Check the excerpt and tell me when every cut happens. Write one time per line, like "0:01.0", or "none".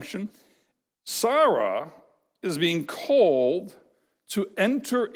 0:00.9